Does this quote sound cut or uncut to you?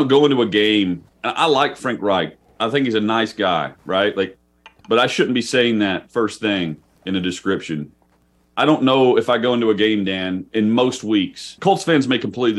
cut